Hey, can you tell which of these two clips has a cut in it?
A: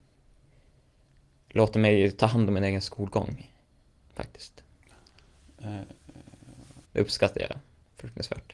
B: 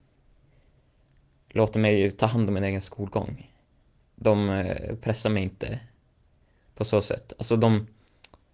A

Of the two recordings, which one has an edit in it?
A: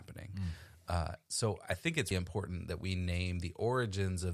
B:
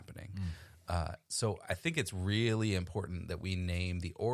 A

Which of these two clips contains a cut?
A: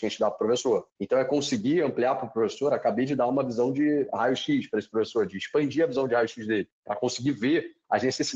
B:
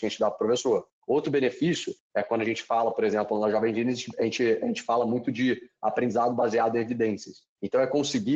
A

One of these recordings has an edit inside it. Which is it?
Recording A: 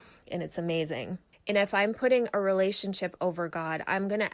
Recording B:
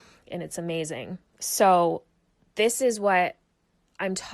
A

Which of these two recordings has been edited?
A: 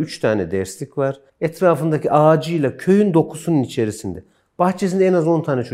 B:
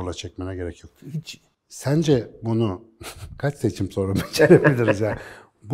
A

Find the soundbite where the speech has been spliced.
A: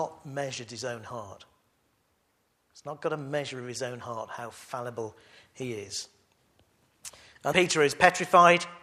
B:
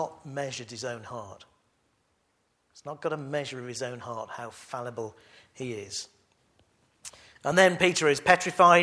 A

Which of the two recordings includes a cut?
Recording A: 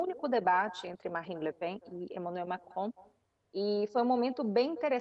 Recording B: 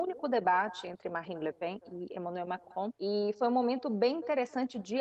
B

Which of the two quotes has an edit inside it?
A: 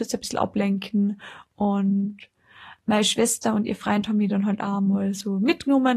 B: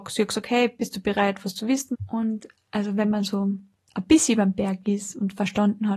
B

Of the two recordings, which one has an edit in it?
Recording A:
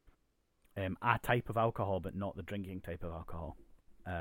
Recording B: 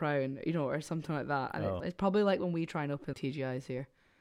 B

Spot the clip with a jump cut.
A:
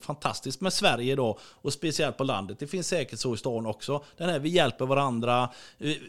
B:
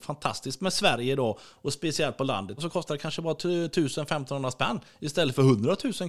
B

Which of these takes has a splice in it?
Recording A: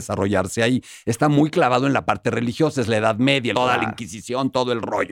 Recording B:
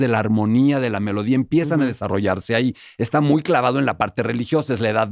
A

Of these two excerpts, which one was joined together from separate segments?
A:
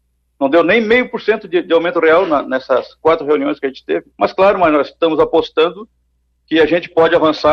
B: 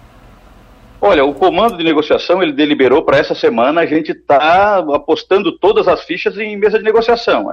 A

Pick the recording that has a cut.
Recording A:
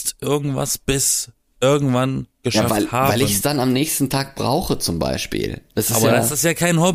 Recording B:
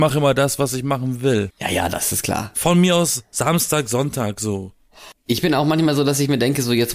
B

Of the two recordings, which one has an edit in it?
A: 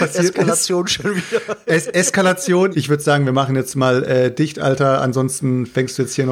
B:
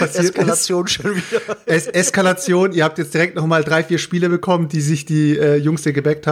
A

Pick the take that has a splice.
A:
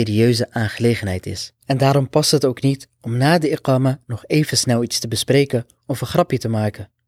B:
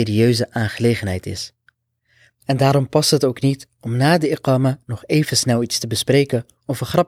A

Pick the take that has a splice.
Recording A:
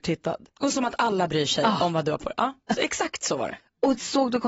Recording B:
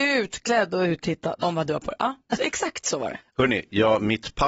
B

